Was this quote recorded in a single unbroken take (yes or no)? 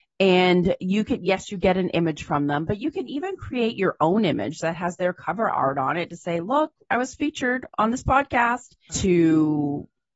no